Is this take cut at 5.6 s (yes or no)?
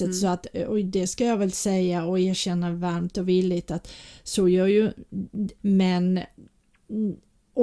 yes